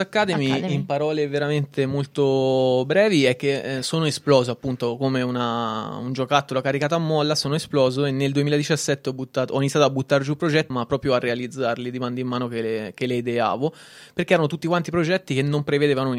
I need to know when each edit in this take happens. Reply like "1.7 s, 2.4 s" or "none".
10.7 s